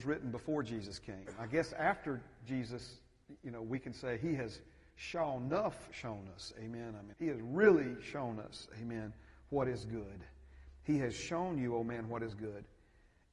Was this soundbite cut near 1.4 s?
no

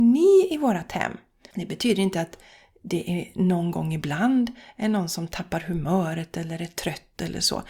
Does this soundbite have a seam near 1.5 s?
yes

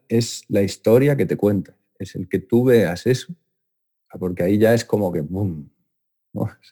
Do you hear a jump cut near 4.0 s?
yes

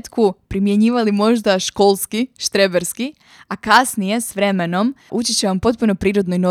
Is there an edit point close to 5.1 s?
yes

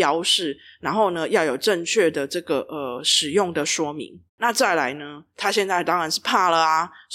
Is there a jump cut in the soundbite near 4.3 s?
yes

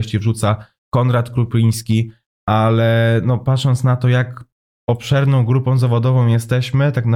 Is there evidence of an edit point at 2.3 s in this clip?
no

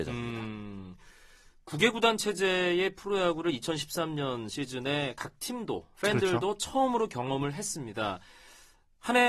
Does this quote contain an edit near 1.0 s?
no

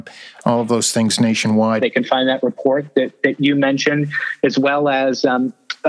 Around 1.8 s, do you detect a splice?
yes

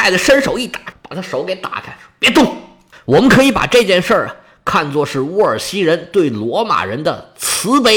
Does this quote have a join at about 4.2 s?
no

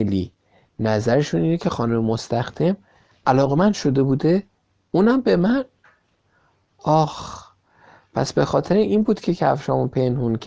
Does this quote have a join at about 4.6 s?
no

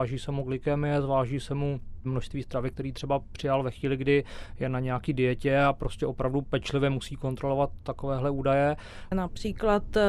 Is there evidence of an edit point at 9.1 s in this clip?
yes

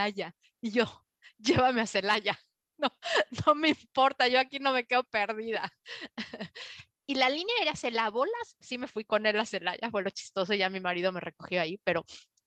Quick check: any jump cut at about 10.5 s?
no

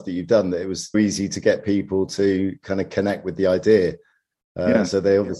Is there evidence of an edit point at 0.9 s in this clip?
yes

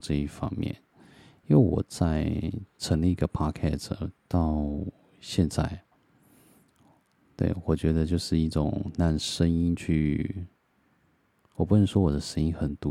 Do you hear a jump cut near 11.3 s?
no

